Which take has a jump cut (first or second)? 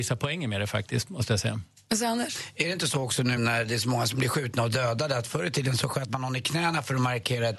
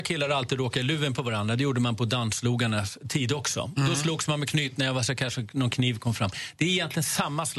first